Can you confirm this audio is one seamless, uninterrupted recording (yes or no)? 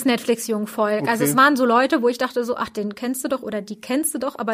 yes